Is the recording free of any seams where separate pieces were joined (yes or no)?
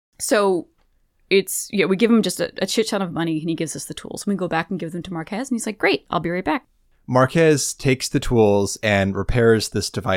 yes